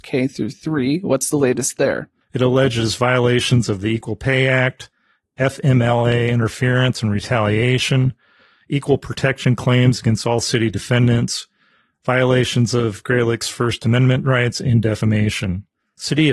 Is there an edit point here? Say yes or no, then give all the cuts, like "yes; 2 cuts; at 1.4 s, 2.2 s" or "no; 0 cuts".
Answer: yes; 1 cut; at 2.2 s